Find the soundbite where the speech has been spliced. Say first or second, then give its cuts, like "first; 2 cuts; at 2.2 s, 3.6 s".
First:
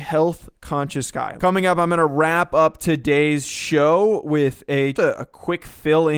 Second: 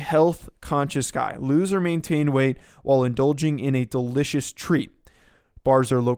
first; 2 cuts; at 1.4 s, 4.9 s